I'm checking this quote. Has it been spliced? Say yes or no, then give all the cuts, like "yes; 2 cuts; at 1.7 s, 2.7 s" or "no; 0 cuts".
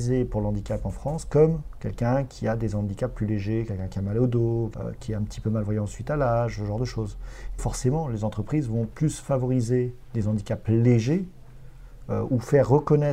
yes; 2 cuts; at 4.7 s, 7.6 s